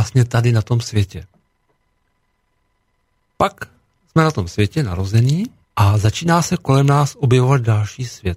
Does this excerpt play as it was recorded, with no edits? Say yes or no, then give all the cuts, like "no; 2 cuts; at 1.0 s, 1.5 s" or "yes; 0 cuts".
no; 1 cut; at 5.6 s